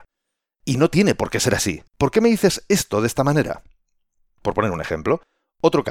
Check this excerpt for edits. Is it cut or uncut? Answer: cut